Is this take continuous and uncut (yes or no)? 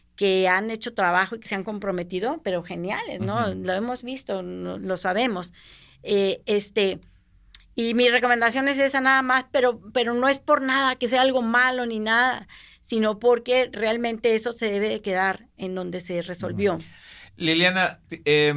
yes